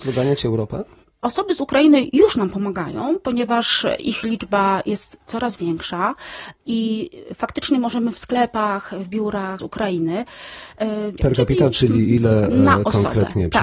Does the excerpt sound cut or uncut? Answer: cut